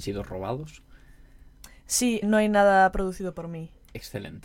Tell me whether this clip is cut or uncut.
cut